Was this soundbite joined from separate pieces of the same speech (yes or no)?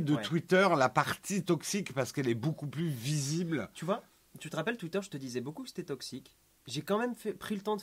no